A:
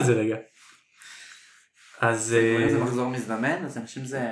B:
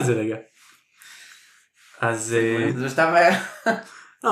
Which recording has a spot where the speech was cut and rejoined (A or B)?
B